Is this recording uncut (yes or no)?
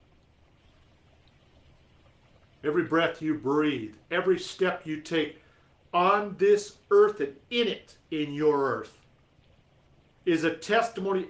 yes